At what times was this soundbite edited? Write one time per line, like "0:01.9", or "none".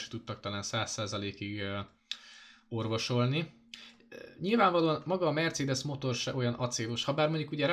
none